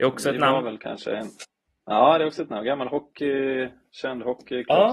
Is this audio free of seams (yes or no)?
yes